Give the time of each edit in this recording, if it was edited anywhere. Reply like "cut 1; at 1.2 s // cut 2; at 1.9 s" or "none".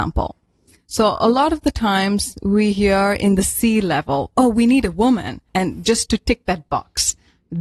cut 1; at 5.5 s